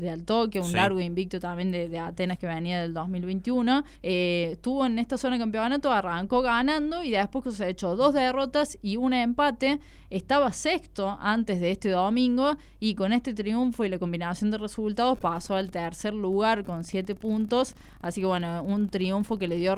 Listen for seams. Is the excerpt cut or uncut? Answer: cut